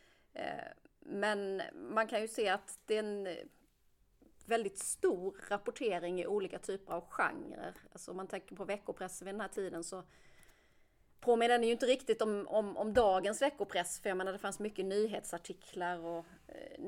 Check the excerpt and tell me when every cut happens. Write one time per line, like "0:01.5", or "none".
none